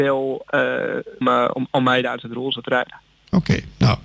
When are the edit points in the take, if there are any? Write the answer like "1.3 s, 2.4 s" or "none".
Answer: 1.2 s